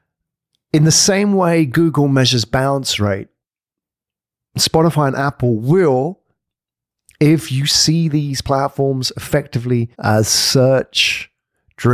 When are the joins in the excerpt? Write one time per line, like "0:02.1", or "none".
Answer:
0:09.9